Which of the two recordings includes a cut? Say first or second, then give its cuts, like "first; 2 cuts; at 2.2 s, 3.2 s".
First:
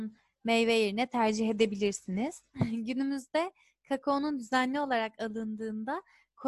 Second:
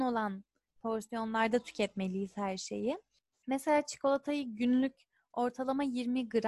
first; 1 cut; at 2.5 s